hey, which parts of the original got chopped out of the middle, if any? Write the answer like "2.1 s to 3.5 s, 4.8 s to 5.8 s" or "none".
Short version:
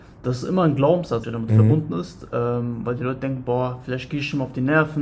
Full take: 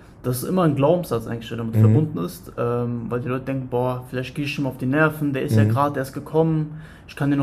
1.2 s to 1.5 s